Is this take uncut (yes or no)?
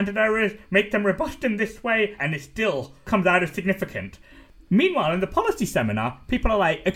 no